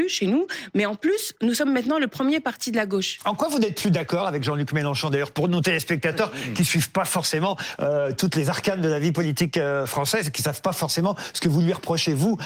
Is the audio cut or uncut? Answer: uncut